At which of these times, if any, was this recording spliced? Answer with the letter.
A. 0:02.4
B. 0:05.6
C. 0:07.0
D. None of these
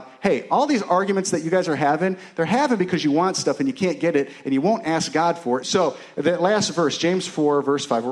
B